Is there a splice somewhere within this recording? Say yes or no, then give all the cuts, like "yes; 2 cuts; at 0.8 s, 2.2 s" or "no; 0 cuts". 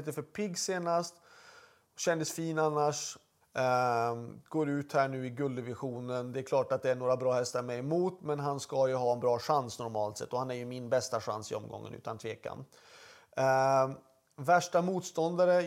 yes; 1 cut; at 3.4 s